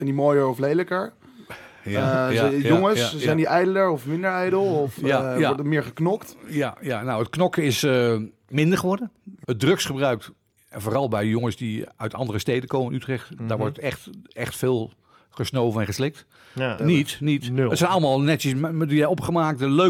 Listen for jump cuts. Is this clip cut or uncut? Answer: cut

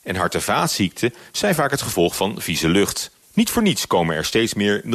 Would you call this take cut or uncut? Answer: cut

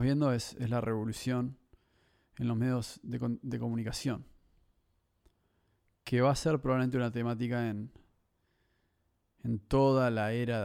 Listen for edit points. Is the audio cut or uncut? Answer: uncut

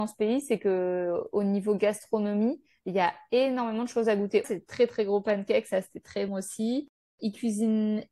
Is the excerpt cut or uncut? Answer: cut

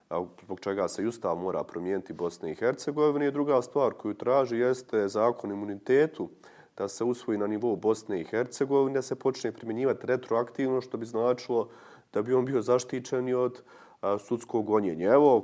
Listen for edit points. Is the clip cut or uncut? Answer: uncut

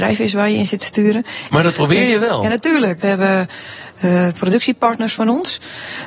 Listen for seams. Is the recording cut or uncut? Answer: cut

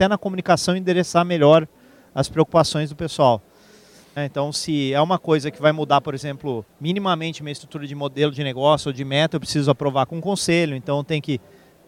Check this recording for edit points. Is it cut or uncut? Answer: cut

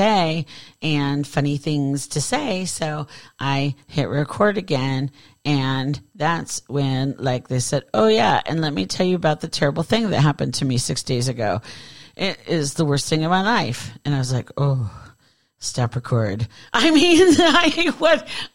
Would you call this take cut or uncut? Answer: uncut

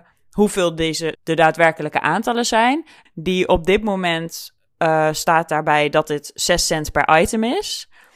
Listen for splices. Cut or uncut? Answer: cut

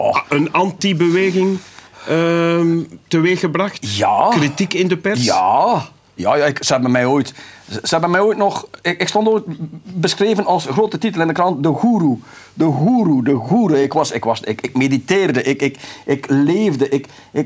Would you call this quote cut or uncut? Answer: uncut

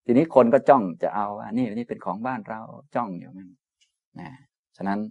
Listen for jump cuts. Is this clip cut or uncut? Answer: uncut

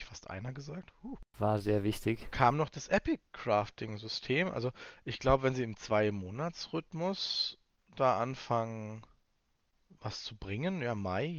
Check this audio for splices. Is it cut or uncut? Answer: uncut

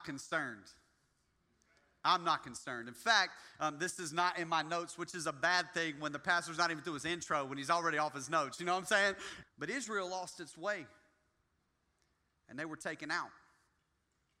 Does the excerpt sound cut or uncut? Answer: cut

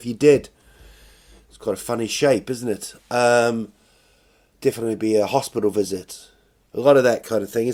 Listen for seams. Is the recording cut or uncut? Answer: cut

